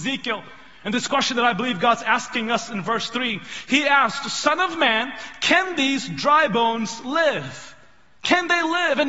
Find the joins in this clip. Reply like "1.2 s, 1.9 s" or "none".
none